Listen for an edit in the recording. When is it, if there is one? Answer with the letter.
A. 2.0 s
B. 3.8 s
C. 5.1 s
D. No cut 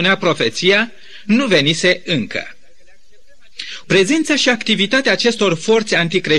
B